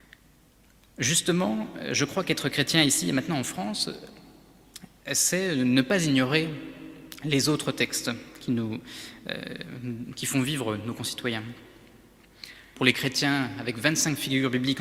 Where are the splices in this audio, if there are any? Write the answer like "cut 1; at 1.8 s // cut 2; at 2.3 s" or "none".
cut 1; at 12.7 s